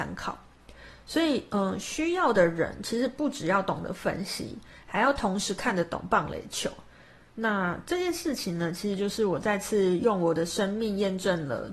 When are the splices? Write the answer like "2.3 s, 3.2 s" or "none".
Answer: 7.3 s

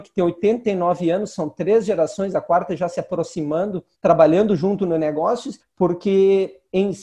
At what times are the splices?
3.9 s, 5.6 s

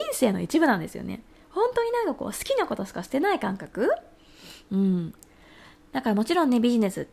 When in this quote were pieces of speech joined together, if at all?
none

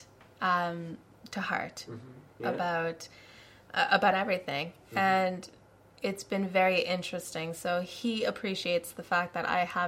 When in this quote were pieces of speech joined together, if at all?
2.4 s

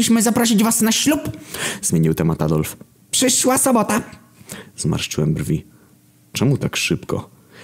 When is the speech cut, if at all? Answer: none

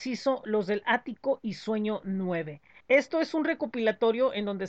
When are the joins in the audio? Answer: 2.8 s

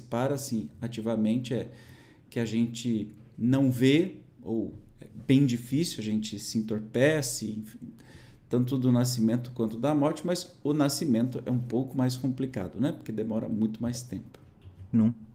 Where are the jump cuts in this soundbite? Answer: none

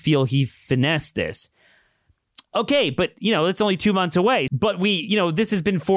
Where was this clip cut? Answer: 2.5 s, 4.5 s

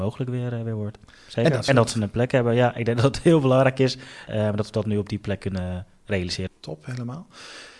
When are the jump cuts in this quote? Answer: 1.7 s, 4.3 s, 6.5 s

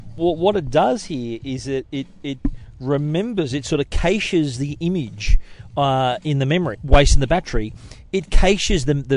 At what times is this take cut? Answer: 6.7 s

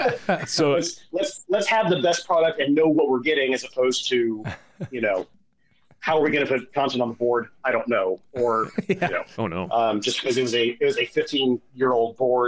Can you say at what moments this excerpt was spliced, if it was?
9.3 s

